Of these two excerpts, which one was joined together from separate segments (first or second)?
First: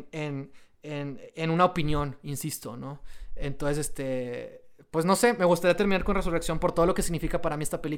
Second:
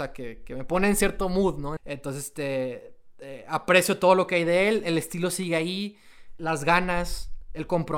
second